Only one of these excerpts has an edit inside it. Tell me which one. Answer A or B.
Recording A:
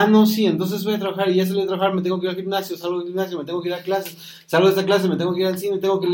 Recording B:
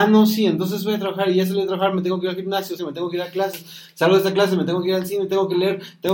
B